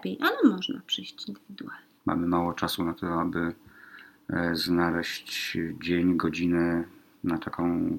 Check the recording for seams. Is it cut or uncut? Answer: cut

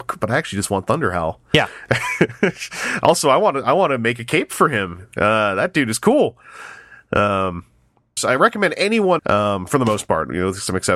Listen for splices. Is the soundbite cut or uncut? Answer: cut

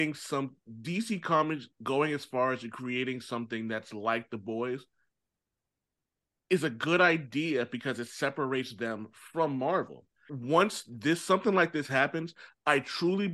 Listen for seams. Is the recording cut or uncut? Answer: cut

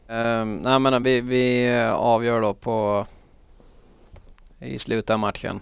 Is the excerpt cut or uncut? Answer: uncut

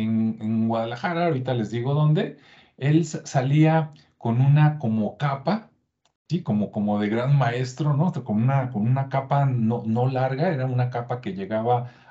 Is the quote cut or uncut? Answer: uncut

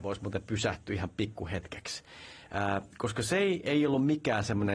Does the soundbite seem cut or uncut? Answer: uncut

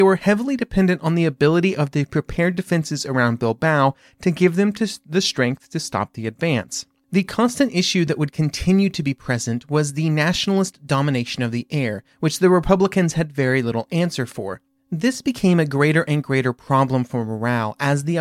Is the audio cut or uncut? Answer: uncut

